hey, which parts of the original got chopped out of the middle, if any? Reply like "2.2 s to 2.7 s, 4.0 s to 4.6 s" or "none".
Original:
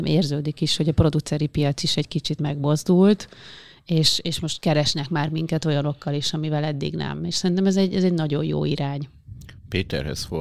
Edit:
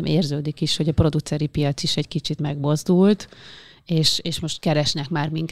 none